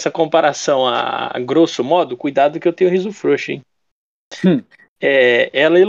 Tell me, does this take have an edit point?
no; 0 cuts

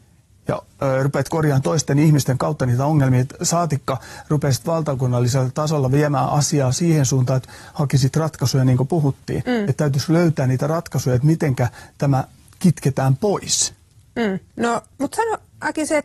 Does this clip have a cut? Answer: no; 0 cuts

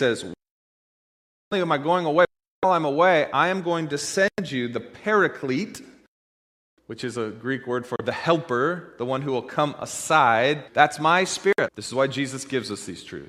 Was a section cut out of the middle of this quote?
yes; 2 cuts; at 10.7 s, 11.7 s

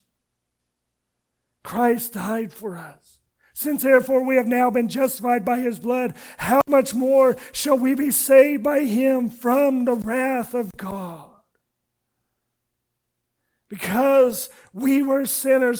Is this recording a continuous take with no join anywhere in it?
yes; 0 cuts

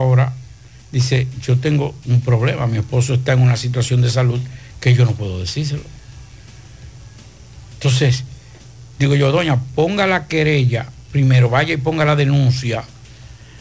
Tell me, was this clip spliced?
no; 0 cuts

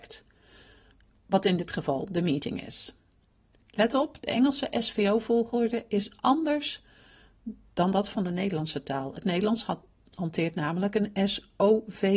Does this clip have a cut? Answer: no; 0 cuts

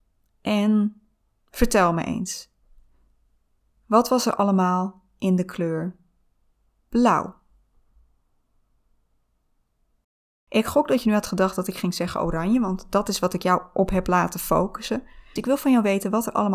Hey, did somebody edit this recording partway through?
yes; 1 cut; at 15.4 s

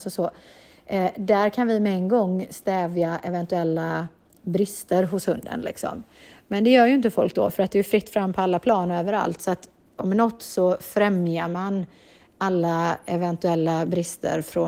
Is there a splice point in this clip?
no; 0 cuts

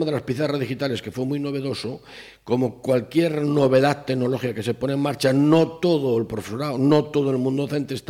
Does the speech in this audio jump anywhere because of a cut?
no; 0 cuts

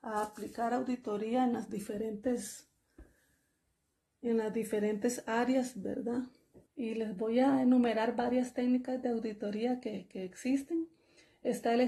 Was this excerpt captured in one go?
no; 1 cut; at 6.6 s

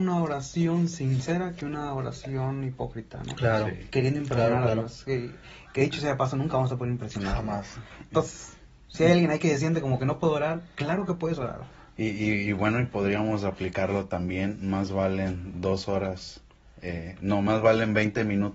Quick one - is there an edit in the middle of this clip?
no; 0 cuts

